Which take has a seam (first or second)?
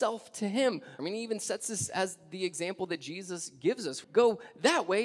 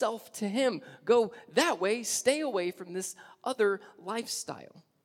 first